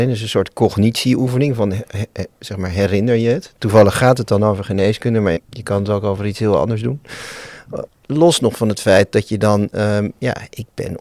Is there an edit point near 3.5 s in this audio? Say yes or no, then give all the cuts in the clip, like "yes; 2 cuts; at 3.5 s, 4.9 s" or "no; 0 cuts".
no; 2 cuts; at 5.4 s, 7.9 s